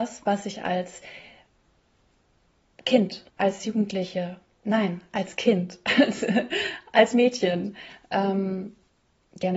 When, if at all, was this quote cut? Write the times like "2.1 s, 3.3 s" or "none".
3.3 s